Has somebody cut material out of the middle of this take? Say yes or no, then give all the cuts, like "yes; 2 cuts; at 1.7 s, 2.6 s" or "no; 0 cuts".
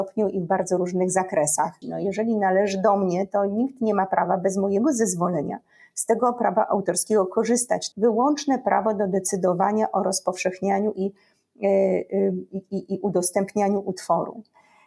yes; 2 cuts; at 1.8 s, 7.9 s